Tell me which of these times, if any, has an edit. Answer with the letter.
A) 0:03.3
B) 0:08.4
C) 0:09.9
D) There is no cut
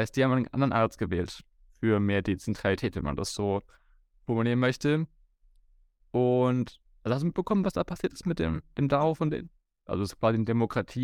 C